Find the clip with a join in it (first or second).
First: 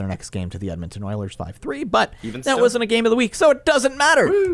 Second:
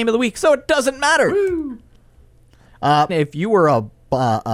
second